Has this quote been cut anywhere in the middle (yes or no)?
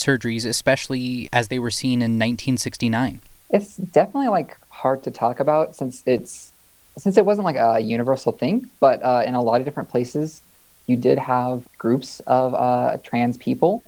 yes